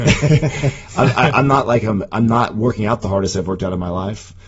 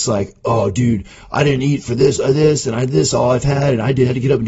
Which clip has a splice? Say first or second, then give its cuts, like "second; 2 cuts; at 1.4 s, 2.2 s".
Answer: first; 1 cut; at 2.1 s